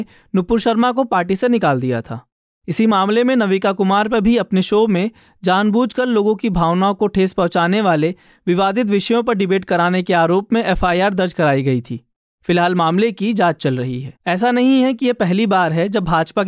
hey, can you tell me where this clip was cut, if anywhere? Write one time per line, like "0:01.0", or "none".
0:14.2